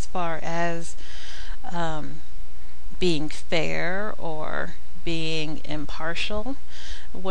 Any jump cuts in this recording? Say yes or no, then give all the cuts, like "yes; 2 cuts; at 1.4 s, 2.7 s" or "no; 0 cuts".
no; 0 cuts